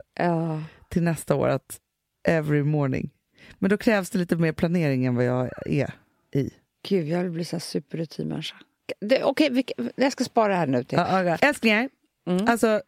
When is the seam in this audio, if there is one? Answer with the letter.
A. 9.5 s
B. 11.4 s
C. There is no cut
B